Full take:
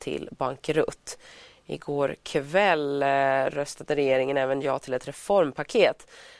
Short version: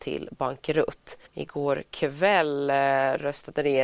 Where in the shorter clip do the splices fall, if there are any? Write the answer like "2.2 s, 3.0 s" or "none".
1.3 s